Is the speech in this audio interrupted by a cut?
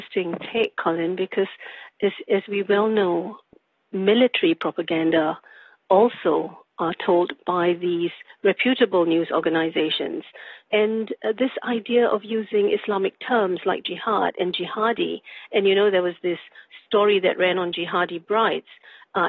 no; 0 cuts

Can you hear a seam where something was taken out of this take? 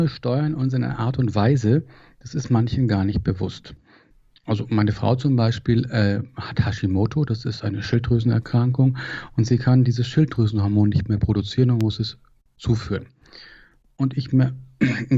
no; 0 cuts

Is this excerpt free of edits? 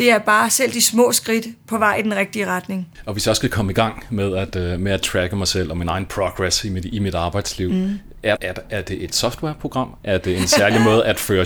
no; 1 cut; at 8.4 s

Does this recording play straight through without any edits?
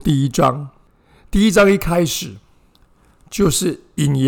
yes; 0 cuts

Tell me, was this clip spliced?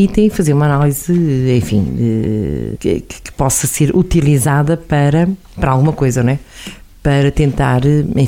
yes; 1 cut; at 2.8 s

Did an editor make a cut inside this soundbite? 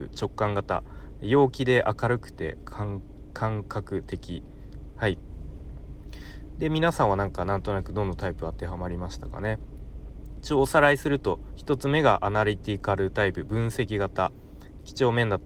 yes; 1 cut; at 4.9 s

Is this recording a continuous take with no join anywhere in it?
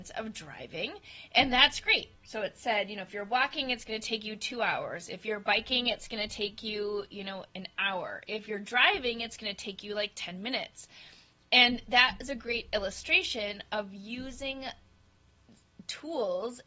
no; 1 cut; at 2.1 s

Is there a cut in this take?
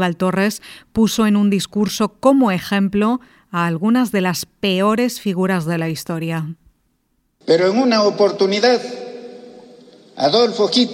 yes; 1 cut; at 7.4 s

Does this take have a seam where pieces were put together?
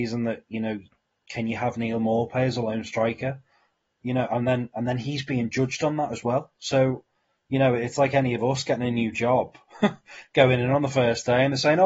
no; 0 cuts

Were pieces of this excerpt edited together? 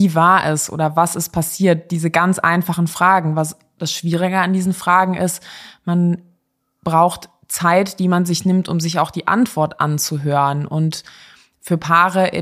no; 0 cuts

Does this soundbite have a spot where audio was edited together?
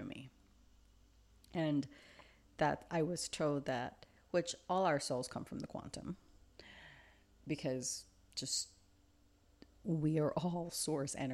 yes; 1 cut; at 4.2 s

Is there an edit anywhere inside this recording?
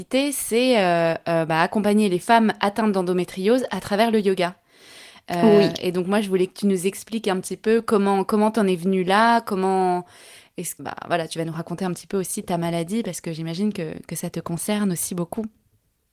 yes; 1 cut; at 10.8 s

